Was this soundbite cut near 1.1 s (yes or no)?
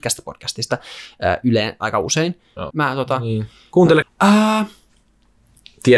no